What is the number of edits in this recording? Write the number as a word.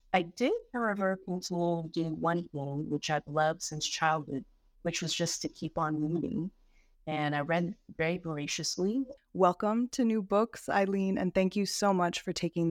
one